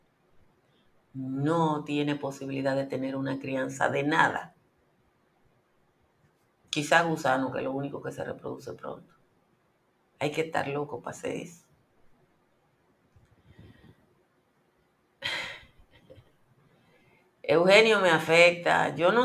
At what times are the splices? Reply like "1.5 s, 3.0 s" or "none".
10.1 s